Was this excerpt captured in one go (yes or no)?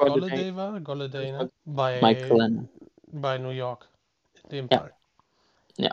no